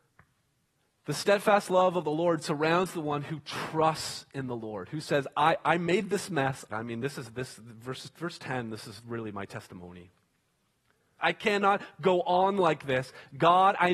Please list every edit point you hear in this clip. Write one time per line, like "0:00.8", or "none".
0:06.7
0:11.2